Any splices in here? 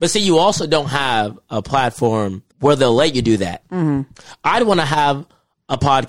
yes; 2 cuts; at 2.5 s, 3.6 s

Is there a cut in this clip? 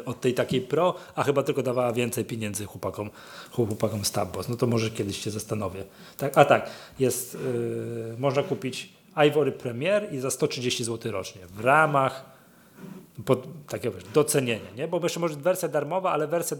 no; 0 cuts

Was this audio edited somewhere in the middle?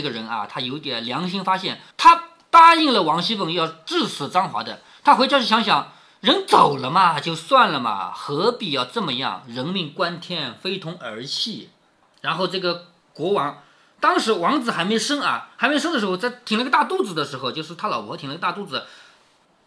yes; 2 cuts; at 1.9 s, 12.1 s

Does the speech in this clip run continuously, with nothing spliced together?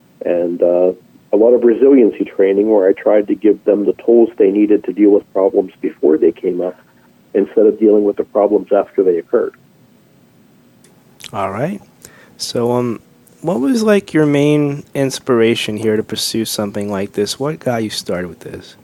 yes; 0 cuts

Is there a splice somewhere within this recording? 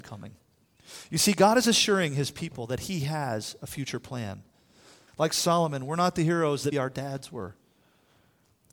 yes; 2 cuts; at 5.1 s, 6.7 s

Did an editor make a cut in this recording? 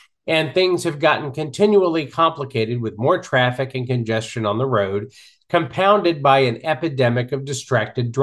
no; 0 cuts

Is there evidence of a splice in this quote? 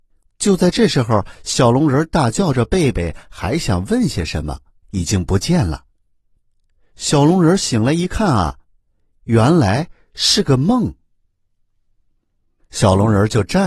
yes; 1 cut; at 4.8 s

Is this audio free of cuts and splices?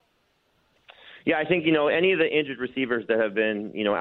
yes; 0 cuts

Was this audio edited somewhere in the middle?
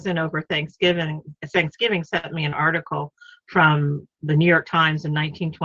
no; 0 cuts

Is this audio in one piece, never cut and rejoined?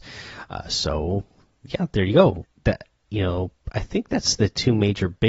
no; 1 cut; at 2.4 s

